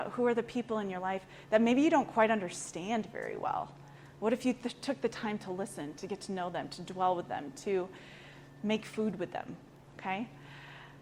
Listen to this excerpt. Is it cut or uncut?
uncut